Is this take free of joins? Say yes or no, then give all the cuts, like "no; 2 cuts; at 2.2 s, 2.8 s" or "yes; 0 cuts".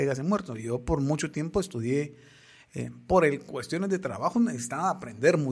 yes; 0 cuts